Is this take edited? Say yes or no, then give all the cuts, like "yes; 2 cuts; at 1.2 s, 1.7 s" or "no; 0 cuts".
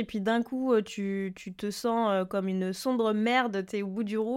no; 0 cuts